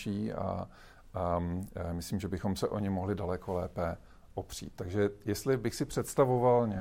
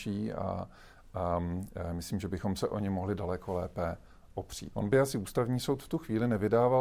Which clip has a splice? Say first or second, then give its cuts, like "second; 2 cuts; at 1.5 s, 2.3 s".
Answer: second; 1 cut; at 4.7 s